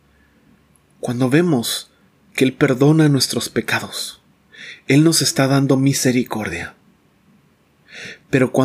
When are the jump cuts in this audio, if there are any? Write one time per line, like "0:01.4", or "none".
none